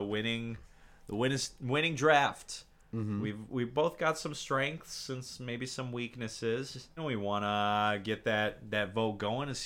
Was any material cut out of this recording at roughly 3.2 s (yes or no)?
no